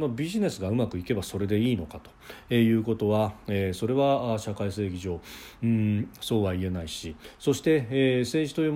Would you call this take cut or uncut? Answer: uncut